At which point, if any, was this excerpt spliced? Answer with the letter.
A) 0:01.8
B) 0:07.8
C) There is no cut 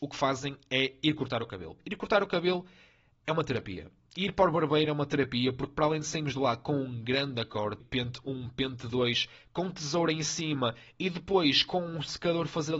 B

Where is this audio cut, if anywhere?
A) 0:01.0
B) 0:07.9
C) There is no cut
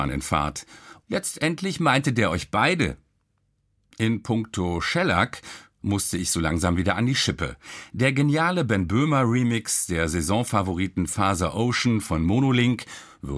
A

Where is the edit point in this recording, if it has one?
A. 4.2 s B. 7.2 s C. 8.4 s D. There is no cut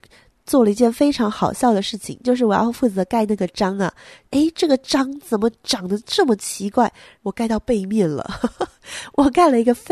B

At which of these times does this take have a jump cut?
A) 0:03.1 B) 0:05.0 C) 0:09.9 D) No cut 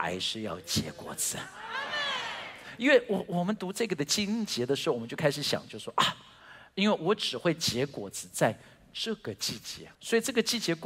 C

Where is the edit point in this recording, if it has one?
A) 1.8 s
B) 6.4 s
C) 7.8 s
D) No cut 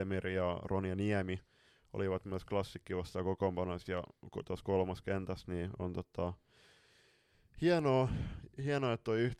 D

